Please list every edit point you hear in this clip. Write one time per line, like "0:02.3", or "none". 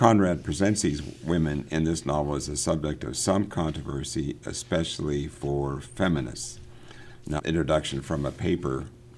0:07.4